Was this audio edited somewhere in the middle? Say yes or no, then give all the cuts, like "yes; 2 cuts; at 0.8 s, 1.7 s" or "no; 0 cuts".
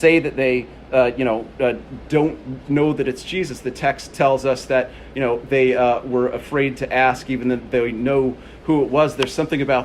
yes; 1 cut; at 7.6 s